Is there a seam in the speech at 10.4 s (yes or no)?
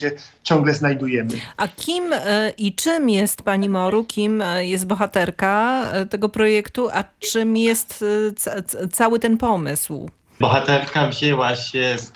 yes